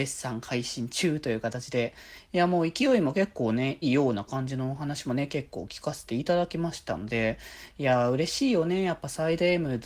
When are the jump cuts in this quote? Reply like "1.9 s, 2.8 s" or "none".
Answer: 3.8 s